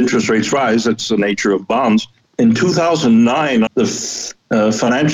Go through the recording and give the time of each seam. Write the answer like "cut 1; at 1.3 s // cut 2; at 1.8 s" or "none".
cut 1; at 2.2 s // cut 2; at 3.7 s